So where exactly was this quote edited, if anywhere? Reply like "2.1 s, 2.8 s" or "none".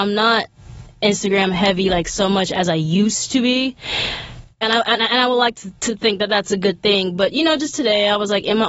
none